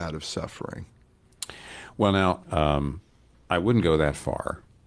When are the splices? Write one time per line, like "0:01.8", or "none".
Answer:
0:02.4